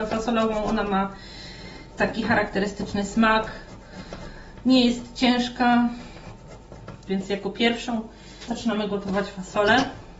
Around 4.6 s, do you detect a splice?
no; 2 cuts; at 7.1 s, 8.5 s

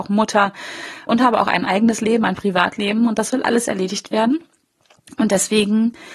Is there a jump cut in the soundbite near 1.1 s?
yes; 1 cut; at 1.1 s

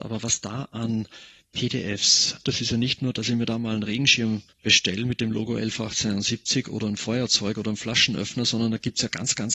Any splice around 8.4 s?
no; 2 cuts; at 2.4 s, 4.5 s

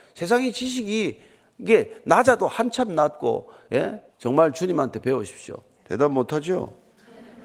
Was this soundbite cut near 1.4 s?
no; 2 cuts; at 4.1 s, 5.8 s

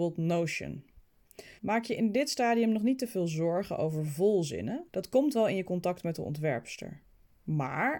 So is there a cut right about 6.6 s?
no; 2 cuts; at 1.6 s, 4.9 s

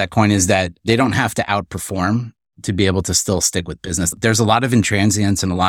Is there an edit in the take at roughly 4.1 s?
no; 0 cuts

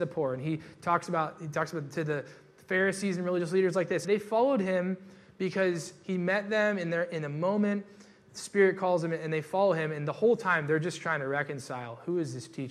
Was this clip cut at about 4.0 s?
yes; 1 cut; at 4.0 s

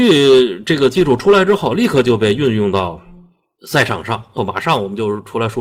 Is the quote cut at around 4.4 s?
yes; 1 cut; at 4.4 s

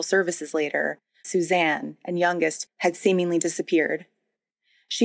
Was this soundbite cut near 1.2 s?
yes; 2 cuts; at 1.2 s, 2.7 s

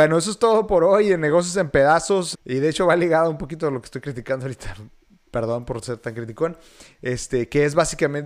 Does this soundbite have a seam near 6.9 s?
no; 1 cut; at 2.3 s

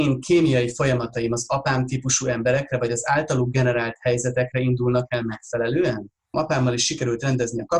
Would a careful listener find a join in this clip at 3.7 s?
no; 1 cut; at 6.3 s

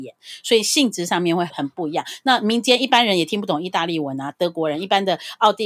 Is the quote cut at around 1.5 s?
yes; 1 cut; at 1.5 s

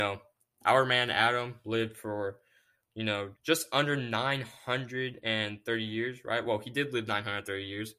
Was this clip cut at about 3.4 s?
yes; 1 cut; at 3.4 s

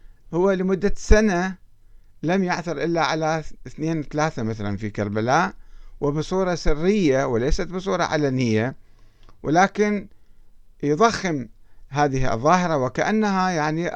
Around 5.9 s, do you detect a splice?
no; 0 cuts

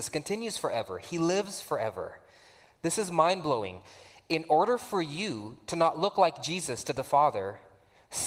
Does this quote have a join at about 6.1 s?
no; 0 cuts

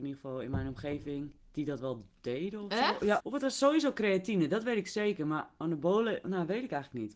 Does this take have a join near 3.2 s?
yes; 1 cut; at 3.2 s

